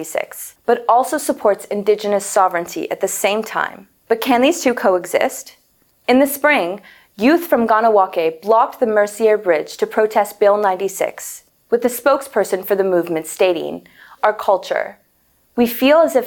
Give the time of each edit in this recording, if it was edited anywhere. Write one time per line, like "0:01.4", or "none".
0:14.2